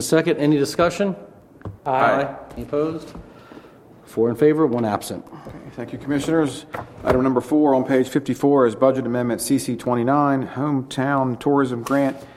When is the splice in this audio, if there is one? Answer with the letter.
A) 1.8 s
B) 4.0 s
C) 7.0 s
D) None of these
A